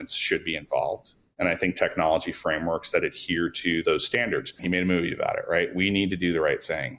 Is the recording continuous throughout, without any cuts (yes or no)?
no